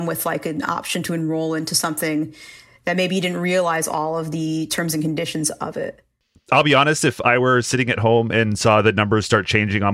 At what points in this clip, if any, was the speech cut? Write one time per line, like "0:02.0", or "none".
none